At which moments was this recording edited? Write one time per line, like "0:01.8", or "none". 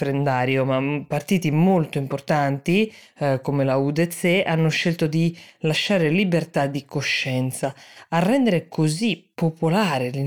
none

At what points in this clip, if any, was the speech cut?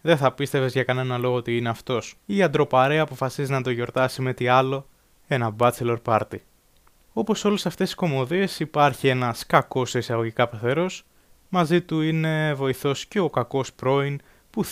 0:02.2

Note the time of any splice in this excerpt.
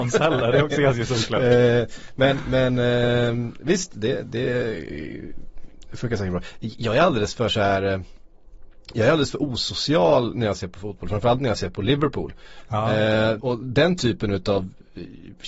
0:13.4

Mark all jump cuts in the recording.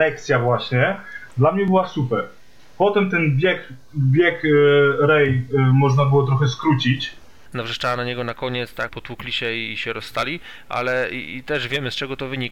0:07.5
0:08.9

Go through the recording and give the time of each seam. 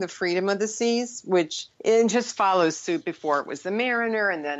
0:01.7

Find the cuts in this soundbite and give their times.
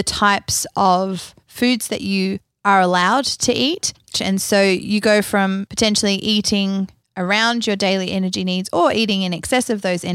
0:04.1
0:05.7

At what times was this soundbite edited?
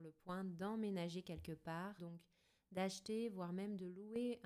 0:02.0

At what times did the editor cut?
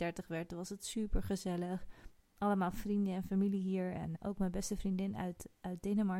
0:04.2

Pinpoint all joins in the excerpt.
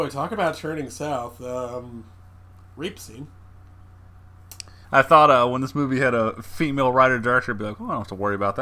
0:04.8

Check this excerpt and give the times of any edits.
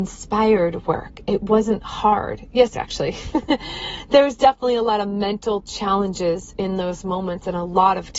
0:02.7

